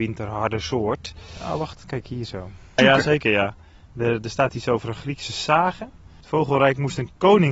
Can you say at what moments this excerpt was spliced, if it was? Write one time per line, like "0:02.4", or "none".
0:02.8